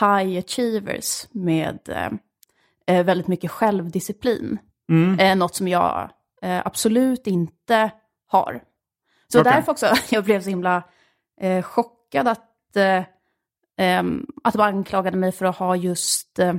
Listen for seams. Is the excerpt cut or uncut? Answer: uncut